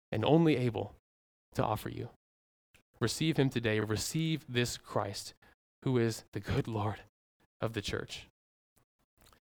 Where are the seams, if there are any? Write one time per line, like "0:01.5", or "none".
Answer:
none